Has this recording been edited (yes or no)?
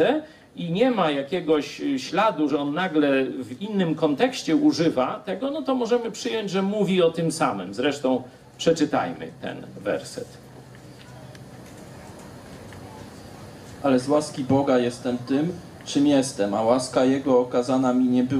no